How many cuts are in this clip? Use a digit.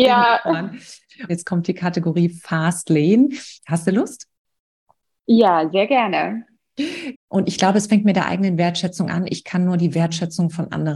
3